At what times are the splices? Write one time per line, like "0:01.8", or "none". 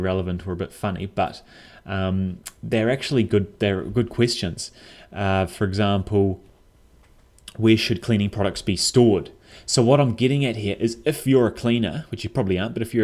none